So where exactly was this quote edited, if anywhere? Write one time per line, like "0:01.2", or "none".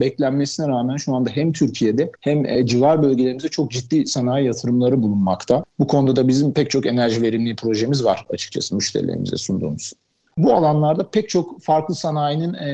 0:05.6
0:10.3